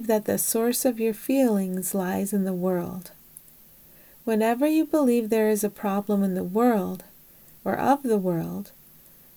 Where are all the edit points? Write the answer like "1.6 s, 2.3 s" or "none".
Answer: 7.6 s